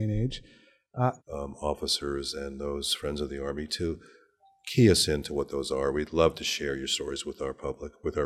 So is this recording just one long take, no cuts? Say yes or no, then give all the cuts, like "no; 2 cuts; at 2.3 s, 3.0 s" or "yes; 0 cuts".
no; 1 cut; at 1.2 s